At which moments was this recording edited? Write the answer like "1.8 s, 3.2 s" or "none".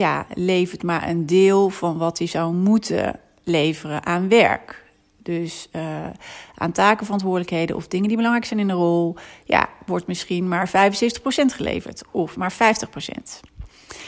none